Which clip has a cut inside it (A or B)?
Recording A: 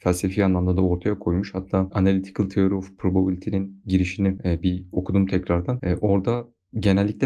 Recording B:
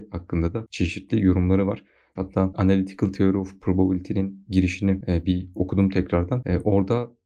B